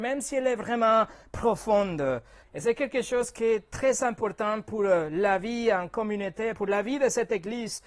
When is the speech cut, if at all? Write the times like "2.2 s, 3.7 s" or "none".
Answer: 2.4 s, 6.5 s